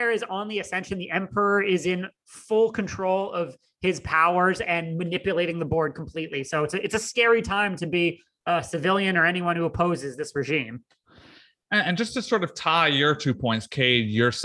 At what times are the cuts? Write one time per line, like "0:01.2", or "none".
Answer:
none